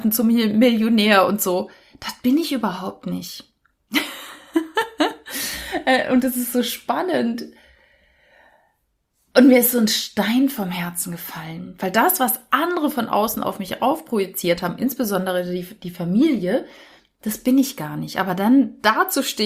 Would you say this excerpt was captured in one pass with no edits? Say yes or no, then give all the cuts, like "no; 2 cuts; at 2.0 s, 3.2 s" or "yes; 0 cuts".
yes; 0 cuts